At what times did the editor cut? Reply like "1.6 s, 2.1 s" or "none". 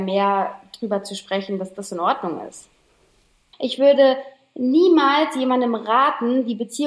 3.5 s